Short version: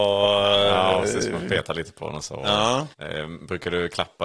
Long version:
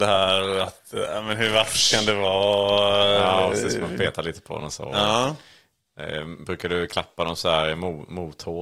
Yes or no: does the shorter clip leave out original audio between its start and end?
yes